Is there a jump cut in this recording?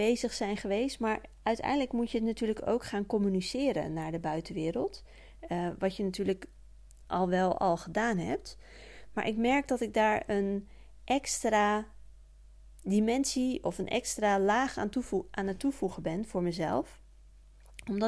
no; 0 cuts

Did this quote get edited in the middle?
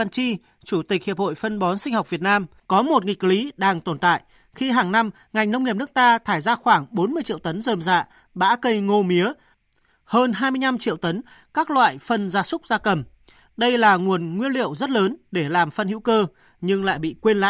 no; 0 cuts

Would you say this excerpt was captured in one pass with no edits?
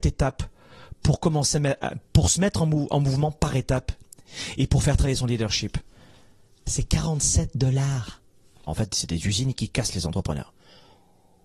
no; 1 cut; at 8.7 s

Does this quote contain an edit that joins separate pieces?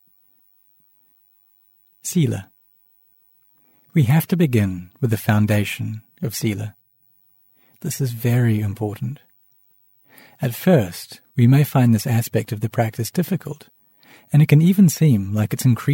no; 0 cuts

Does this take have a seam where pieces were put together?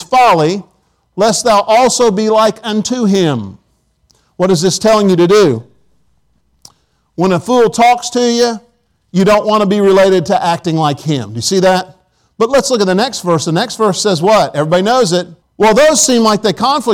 yes; 1 cut; at 15.4 s

